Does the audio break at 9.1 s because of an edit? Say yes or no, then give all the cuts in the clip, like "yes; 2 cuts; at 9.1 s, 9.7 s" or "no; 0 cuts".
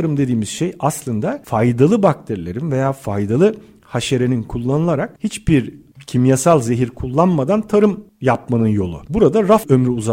no; 0 cuts